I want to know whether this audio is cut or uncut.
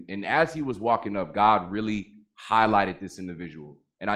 uncut